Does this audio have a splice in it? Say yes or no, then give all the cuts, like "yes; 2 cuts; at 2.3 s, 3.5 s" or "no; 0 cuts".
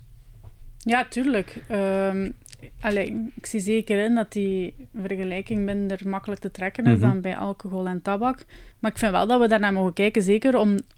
yes; 1 cut; at 8.7 s